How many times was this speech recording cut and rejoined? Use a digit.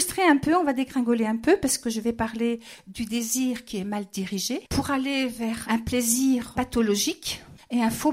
1